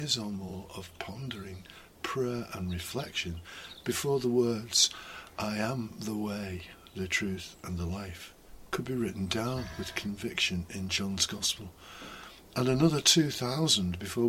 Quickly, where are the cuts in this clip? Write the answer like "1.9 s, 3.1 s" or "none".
none